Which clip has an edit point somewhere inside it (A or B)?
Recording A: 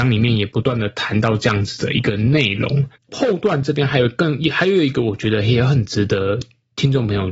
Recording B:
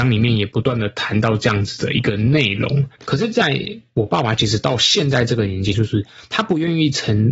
B